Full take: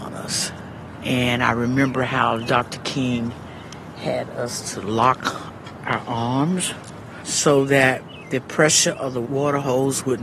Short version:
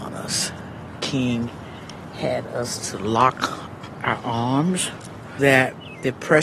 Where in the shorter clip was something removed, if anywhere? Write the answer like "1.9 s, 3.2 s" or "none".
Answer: 1.0 s, 5.4 s